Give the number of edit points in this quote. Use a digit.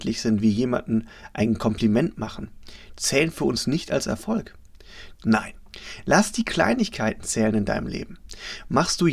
1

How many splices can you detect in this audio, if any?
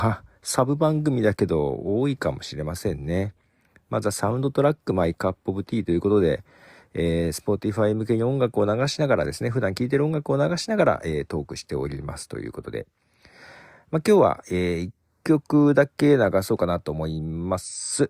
0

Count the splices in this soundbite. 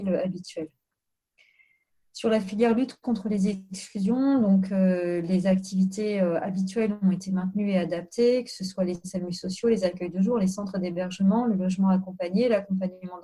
0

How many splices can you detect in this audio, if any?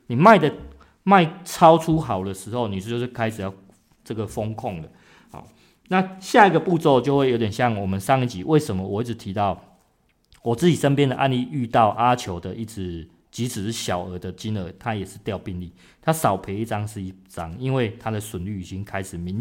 0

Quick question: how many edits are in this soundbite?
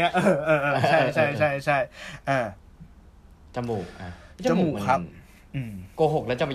0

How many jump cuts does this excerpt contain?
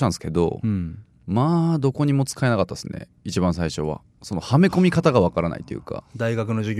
0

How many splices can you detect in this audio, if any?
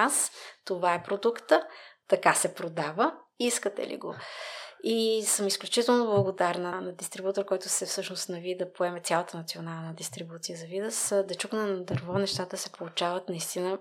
1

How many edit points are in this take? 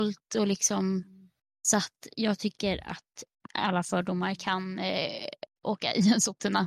1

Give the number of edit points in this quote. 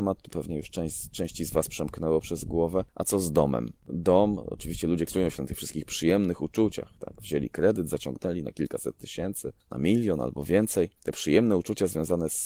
1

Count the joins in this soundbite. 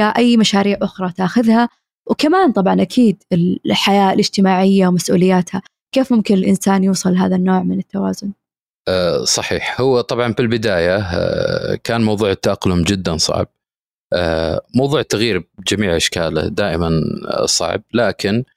1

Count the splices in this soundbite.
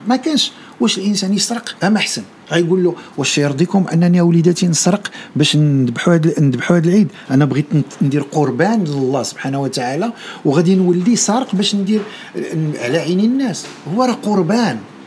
1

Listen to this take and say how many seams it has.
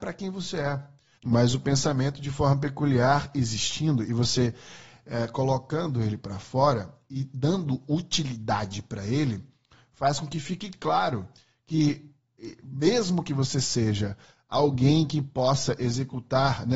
1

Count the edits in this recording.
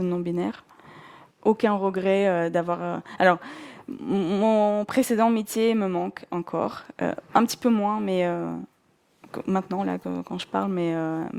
1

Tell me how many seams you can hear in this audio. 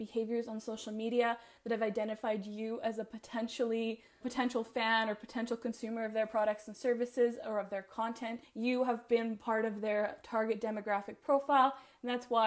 2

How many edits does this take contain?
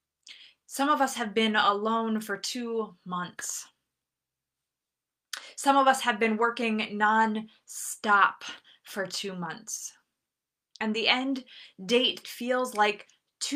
1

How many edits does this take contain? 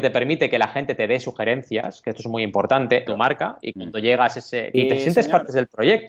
2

